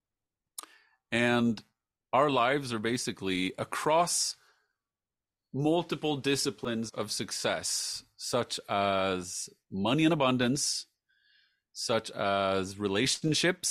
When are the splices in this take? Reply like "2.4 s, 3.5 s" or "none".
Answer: none